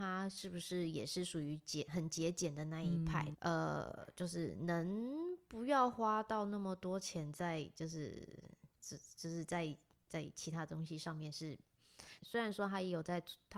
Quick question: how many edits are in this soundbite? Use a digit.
2